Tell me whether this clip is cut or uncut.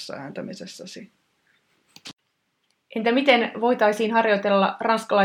uncut